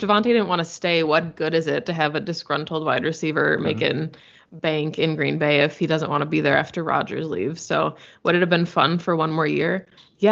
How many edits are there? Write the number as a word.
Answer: zero